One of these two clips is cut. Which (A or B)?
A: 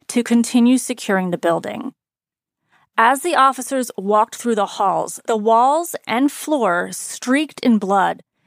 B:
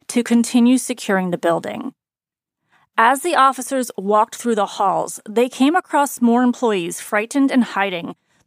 A